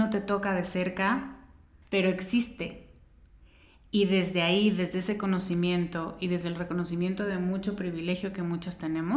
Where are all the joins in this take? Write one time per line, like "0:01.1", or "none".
0:01.8